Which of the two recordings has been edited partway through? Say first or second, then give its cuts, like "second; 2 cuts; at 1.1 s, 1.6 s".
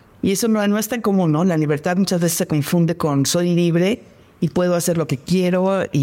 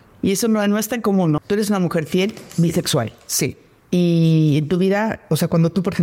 second; 1 cut; at 1.4 s